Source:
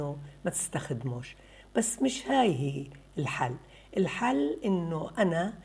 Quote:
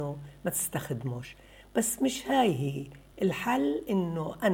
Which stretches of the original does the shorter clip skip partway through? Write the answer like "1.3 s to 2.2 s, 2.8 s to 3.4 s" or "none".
3.1 s to 3.9 s